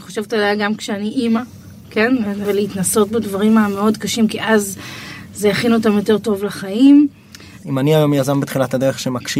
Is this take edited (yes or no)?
yes